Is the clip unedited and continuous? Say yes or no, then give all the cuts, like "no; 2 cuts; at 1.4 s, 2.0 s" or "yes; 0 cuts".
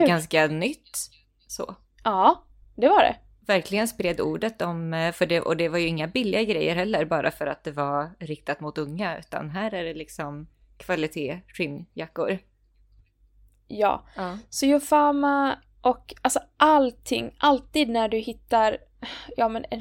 yes; 0 cuts